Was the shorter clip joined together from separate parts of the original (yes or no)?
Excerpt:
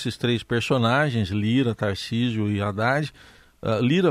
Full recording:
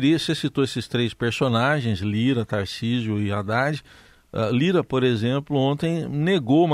no